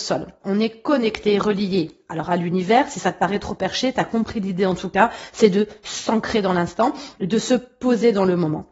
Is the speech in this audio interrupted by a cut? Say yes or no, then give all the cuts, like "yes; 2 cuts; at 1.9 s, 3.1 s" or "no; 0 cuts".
no; 0 cuts